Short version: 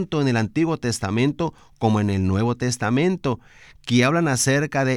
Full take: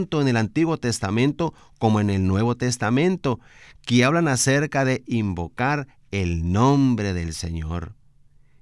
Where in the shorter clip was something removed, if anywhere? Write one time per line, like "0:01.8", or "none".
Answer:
none